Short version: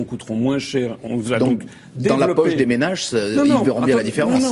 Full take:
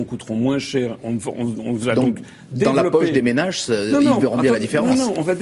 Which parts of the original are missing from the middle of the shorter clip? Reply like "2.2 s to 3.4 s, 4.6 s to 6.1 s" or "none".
1.1 s to 1.6 s